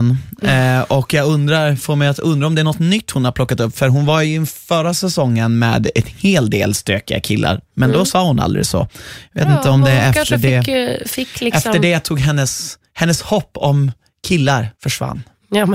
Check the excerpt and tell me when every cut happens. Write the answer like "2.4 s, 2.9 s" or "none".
14.7 s